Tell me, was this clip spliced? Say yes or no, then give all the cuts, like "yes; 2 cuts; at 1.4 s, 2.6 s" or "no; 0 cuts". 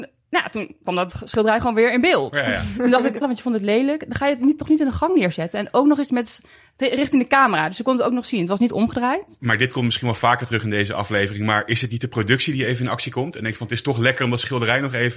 yes; 1 cut; at 3.2 s